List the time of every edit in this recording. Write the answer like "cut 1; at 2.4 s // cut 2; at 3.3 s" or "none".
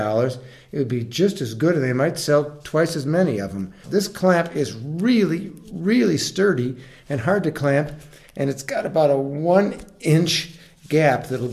cut 1; at 3.8 s